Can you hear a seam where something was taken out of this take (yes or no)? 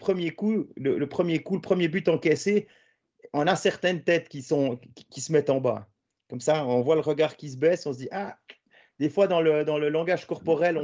no